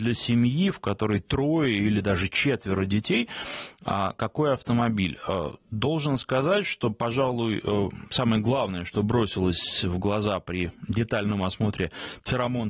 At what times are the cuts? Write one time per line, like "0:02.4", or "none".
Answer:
none